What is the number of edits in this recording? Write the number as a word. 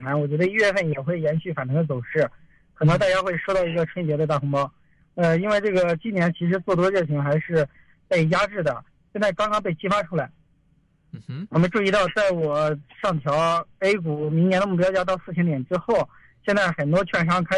zero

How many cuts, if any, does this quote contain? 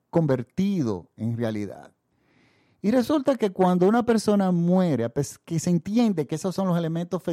zero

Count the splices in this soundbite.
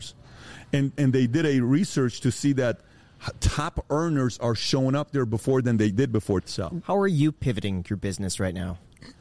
one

